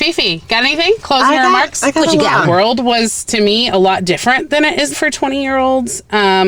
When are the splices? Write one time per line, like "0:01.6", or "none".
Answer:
0:02.4
0:04.9

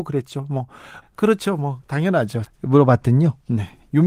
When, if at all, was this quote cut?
0:01.0
0:02.5

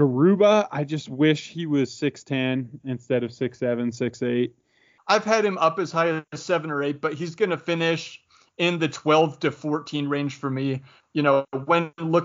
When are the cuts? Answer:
0:05.0
0:11.0

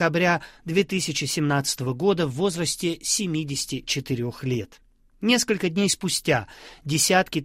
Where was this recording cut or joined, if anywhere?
none

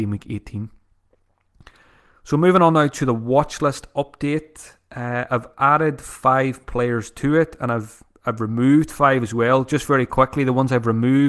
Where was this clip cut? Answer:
none

